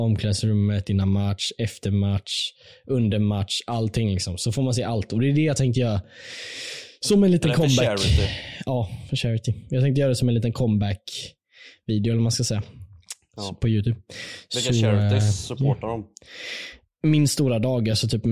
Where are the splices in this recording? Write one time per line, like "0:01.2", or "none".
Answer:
none